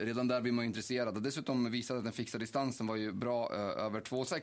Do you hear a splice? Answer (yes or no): no